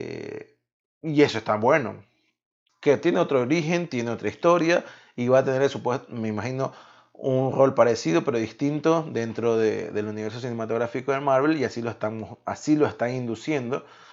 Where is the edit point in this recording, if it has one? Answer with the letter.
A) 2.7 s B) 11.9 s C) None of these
A